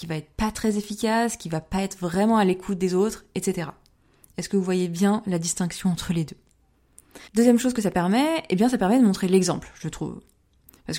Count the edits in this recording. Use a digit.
1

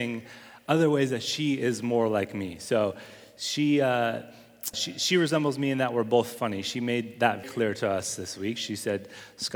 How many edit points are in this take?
2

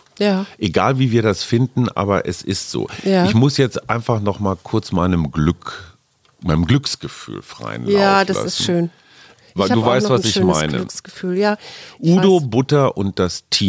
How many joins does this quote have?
0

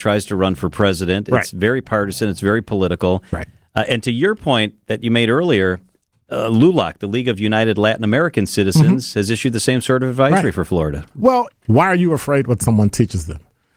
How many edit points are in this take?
1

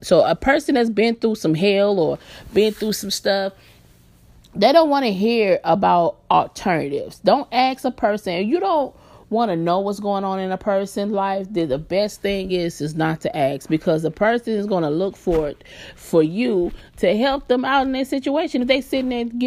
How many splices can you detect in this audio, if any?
0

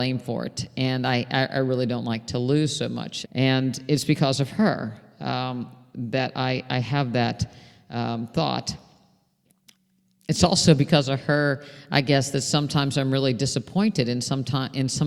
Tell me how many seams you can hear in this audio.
1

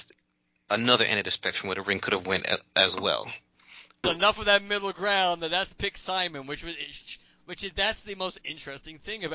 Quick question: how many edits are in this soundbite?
1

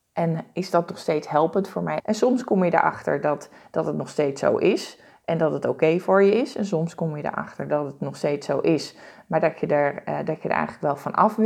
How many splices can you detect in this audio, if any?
1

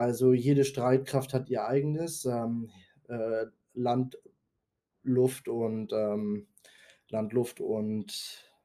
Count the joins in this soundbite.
0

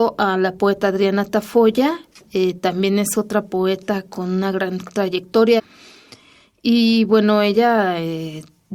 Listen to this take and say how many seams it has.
1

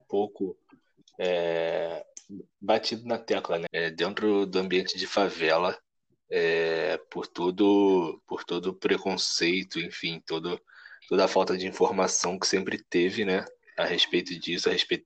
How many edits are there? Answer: 1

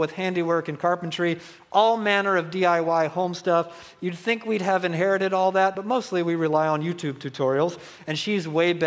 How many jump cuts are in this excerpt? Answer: 0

